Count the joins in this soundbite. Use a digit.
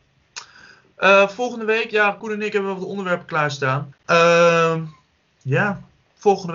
1